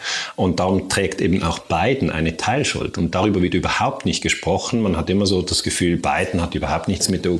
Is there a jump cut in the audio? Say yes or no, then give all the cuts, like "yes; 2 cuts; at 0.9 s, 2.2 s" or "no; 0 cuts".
no; 0 cuts